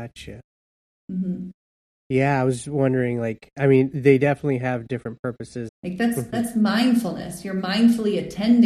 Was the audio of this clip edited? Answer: yes; 1 cut; at 5.7 s

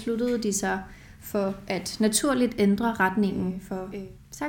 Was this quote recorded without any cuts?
yes; 0 cuts

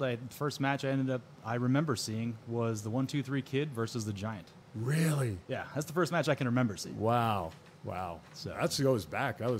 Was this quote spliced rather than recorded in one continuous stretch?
no; 0 cuts

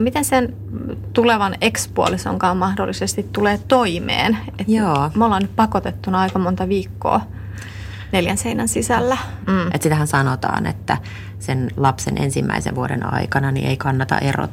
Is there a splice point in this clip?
yes; 1 cut; at 9.4 s

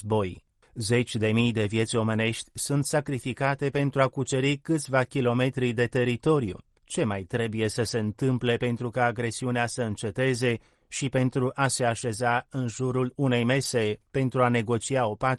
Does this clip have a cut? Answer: yes; 1 cut; at 6.8 s

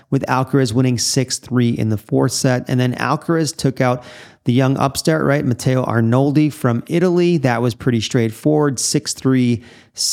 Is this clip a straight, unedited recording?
yes; 0 cuts

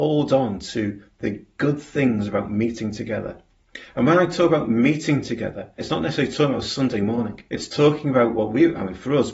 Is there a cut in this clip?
yes; 2 cuts; at 5.8 s, 7.5 s

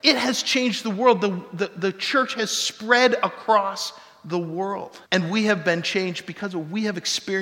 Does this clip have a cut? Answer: yes; 1 cut; at 5.1 s

